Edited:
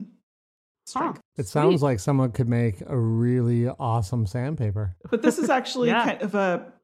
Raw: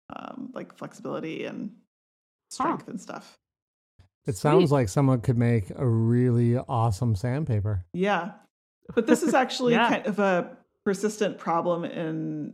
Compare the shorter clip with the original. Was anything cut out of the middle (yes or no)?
yes